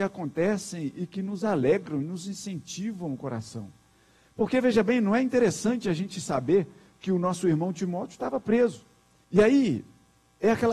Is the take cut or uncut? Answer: cut